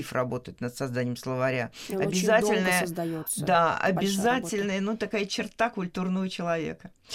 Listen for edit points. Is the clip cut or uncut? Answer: uncut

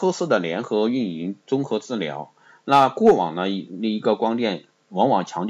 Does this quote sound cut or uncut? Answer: uncut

